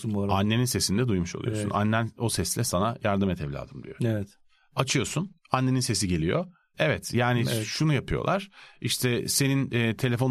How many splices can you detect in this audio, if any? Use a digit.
2